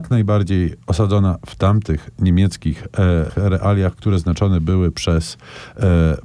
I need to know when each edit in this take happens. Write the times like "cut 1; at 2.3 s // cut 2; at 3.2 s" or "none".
cut 1; at 3.3 s